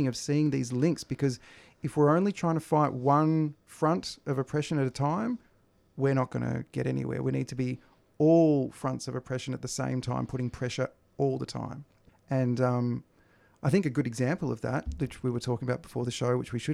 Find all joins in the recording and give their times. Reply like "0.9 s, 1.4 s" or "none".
12.1 s